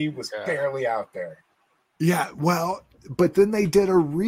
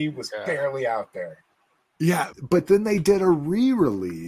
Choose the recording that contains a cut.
second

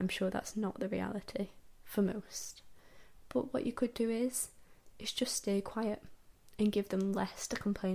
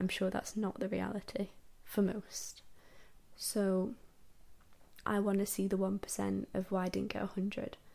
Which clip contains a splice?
second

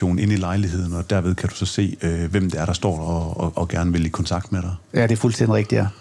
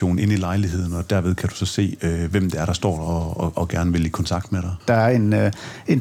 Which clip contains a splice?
second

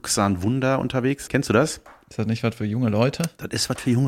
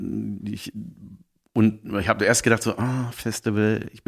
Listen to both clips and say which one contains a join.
first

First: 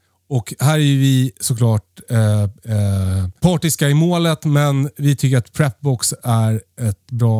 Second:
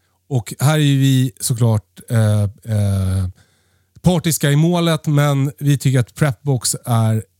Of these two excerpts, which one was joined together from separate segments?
first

